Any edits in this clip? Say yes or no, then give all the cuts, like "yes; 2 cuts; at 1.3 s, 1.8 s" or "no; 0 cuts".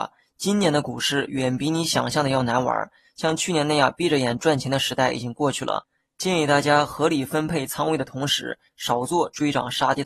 yes; 1 cut; at 8.7 s